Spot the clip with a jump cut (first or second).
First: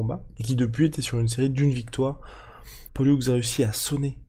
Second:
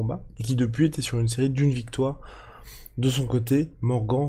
first